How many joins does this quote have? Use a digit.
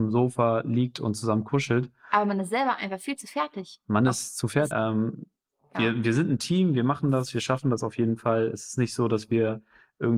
1